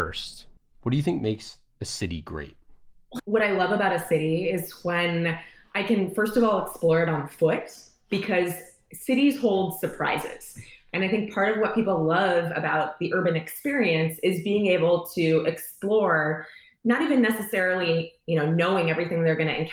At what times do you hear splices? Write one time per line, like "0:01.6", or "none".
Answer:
0:03.2